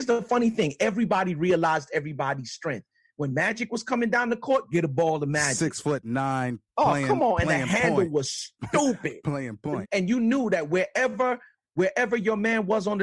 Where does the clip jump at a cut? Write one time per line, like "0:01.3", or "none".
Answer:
0:06.7
0:09.8